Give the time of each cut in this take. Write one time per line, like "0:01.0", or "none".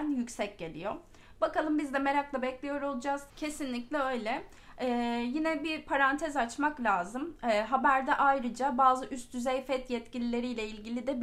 0:03.3